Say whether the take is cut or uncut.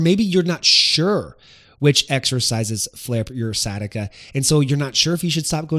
uncut